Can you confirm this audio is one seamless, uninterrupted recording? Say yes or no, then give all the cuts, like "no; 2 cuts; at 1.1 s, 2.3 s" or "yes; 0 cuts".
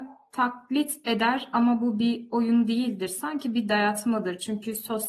yes; 0 cuts